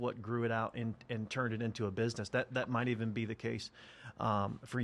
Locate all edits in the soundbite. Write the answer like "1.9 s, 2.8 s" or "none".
none